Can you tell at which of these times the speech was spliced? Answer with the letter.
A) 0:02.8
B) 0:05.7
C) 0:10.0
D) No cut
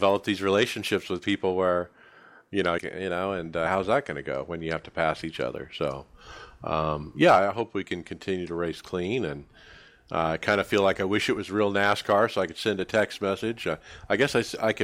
A